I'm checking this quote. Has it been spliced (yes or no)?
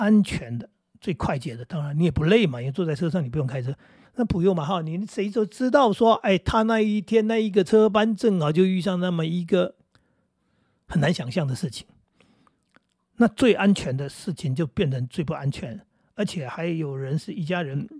yes